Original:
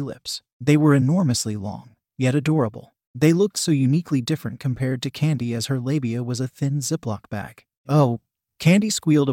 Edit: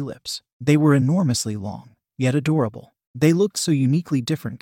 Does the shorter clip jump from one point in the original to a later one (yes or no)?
no